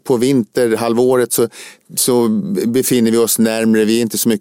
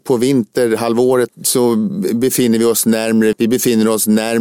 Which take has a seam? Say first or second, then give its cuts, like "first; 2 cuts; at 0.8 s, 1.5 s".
second; 2 cuts; at 1.3 s, 3.3 s